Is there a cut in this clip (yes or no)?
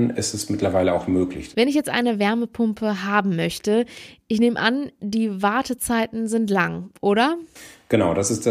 yes